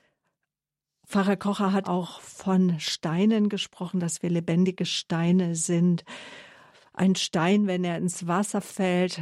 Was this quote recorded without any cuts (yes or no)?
no